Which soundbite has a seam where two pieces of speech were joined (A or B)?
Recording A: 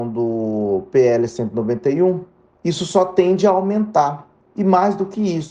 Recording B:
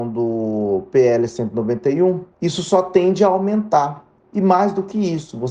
B